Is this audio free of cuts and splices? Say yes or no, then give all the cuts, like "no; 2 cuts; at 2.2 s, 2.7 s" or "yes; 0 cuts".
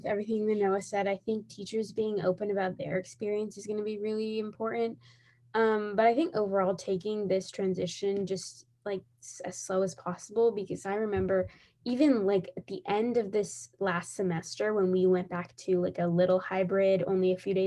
yes; 0 cuts